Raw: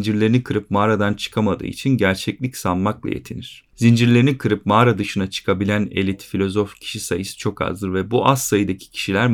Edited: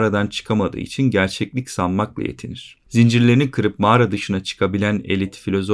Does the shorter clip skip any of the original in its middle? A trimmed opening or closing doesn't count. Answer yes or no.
no